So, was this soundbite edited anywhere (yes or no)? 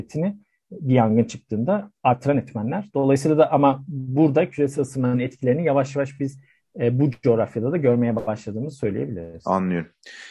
no